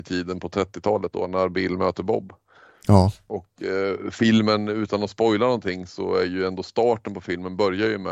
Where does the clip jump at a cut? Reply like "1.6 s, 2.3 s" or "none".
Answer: none